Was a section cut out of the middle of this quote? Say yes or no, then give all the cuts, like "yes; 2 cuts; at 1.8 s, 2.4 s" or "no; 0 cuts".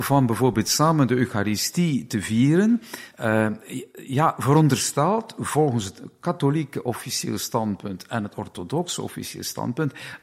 yes; 1 cut; at 3.1 s